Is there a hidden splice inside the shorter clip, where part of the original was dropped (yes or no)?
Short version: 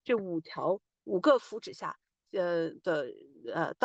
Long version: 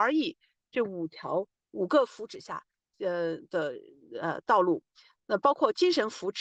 no